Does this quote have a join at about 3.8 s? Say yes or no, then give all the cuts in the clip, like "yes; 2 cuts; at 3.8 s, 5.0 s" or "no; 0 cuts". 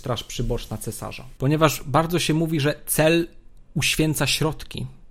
no; 1 cut; at 1.4 s